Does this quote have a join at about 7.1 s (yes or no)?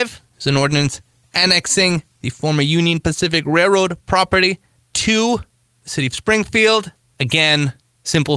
yes